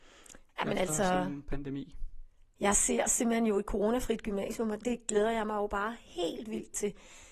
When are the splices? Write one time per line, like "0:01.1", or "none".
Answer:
0:04.8

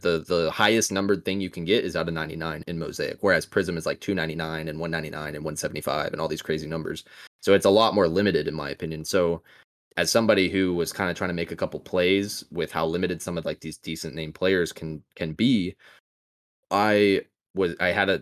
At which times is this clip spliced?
0:02.6

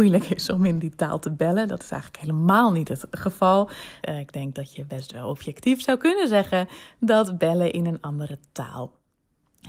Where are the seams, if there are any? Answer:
0:04.0

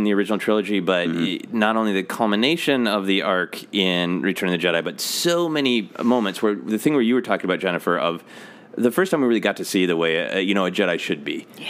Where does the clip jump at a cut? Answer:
none

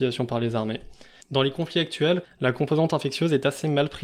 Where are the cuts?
0:01.2
0:02.2

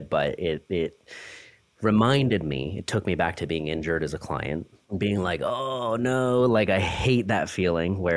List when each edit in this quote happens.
0:04.8

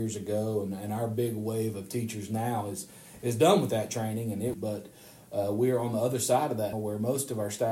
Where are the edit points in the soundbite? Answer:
0:04.5
0:06.7

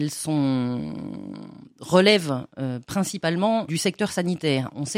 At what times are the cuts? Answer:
0:01.7
0:03.7

